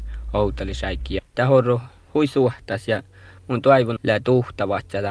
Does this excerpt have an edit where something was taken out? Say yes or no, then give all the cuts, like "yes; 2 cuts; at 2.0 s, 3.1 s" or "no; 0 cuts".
yes; 2 cuts; at 1.3 s, 4.0 s